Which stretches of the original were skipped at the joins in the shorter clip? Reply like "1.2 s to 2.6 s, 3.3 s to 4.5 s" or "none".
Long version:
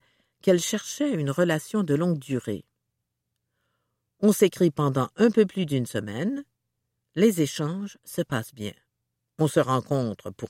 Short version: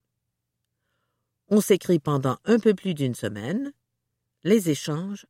none